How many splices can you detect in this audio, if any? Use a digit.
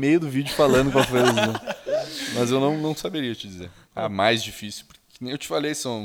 0